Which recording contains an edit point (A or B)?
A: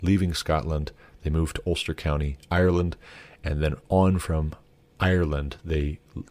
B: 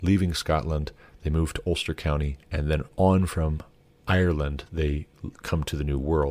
B